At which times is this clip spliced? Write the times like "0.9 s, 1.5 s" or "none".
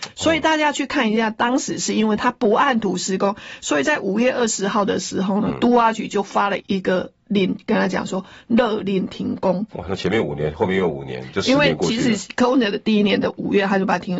6.6 s, 9.7 s